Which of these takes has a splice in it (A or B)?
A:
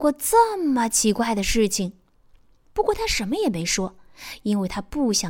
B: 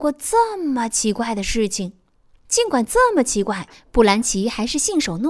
B